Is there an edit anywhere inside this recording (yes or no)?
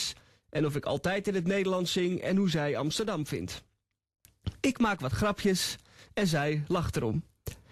no